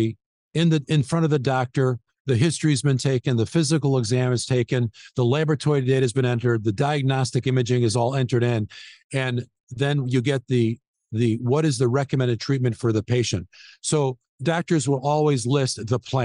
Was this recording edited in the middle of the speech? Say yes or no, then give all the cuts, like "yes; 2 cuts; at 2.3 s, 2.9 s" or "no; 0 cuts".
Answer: no; 0 cuts